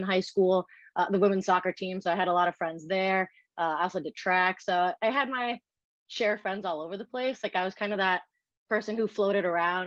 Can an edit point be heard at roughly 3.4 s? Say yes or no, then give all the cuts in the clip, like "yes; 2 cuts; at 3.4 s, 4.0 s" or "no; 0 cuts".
no; 0 cuts